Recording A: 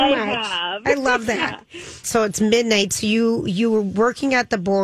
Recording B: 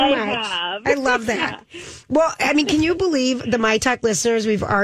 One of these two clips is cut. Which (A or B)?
A